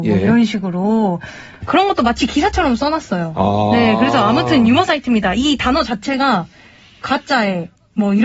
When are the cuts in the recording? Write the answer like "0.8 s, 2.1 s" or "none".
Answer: none